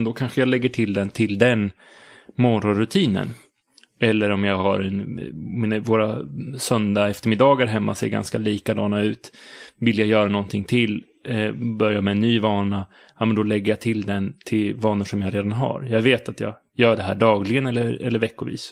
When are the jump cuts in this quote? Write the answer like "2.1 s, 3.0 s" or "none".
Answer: none